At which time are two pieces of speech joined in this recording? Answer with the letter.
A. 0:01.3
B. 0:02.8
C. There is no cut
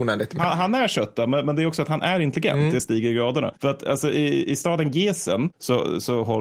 B